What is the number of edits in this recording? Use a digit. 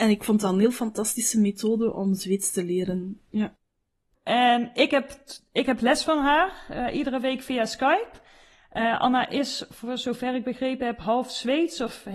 1